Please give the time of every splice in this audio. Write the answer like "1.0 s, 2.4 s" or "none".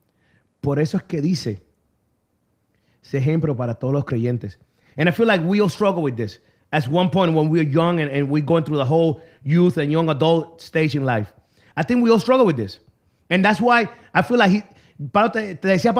none

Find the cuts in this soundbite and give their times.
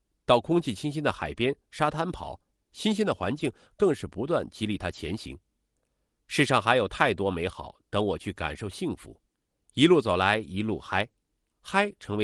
9.6 s

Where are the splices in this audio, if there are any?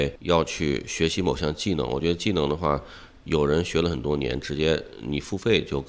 none

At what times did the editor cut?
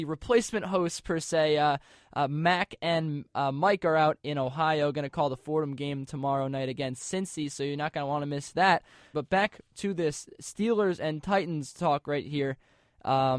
9.1 s

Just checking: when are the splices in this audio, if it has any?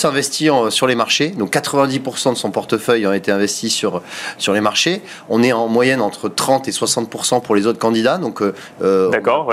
none

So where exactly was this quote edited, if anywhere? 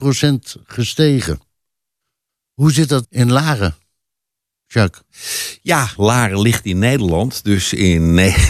3.0 s, 6.0 s

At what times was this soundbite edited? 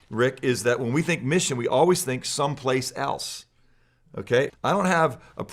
4.5 s

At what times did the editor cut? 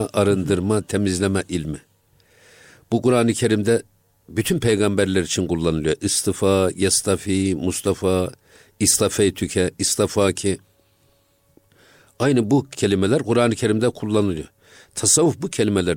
none

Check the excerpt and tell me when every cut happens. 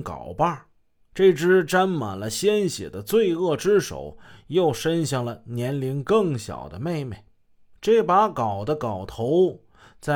none

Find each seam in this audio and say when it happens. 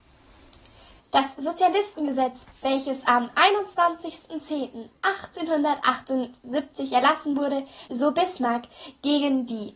7.9 s

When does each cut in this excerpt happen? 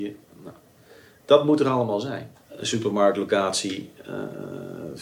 2.4 s

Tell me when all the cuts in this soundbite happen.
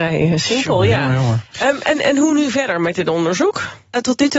none

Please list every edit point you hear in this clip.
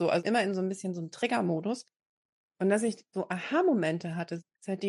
none

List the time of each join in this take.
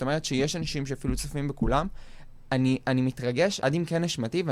3.6 s

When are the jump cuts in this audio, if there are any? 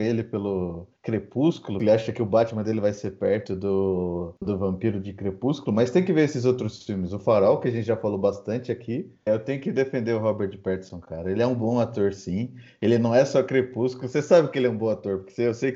1.0 s, 4.4 s, 9.3 s

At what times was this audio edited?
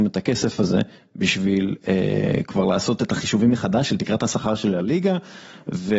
none

